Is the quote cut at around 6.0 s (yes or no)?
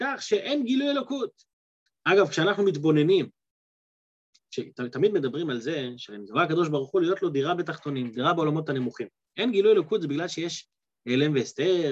no